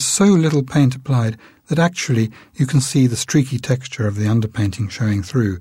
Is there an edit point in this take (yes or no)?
yes